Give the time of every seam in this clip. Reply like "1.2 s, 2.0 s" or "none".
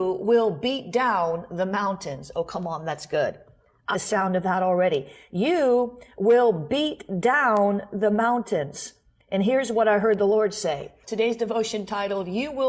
3.9 s, 11.0 s